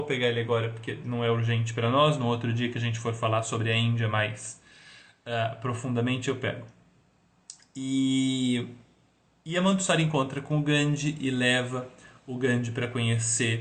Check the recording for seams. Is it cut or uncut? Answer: uncut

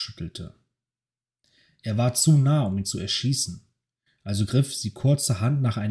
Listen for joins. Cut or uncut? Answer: uncut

